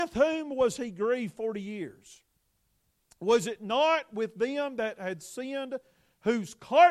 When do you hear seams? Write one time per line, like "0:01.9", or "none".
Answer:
none